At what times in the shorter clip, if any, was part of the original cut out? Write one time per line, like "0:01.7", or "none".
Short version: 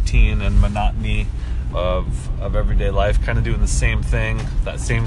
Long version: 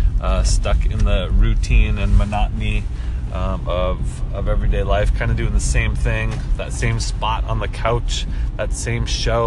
0:01.7